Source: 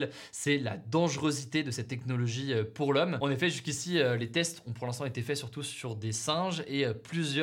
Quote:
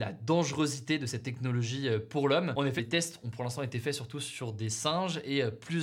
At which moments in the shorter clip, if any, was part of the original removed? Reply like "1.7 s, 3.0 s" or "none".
2.8 s